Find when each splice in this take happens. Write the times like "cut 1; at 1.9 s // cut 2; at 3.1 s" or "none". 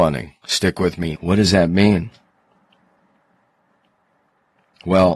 cut 1; at 1.1 s